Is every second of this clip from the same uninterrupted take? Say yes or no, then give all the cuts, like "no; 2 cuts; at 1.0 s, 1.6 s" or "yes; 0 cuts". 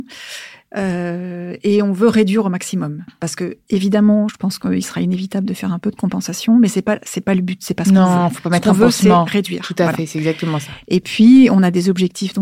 yes; 0 cuts